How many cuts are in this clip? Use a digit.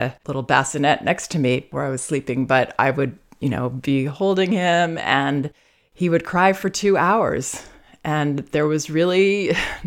0